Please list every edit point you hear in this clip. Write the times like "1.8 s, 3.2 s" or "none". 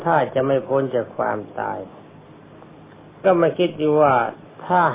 3.2 s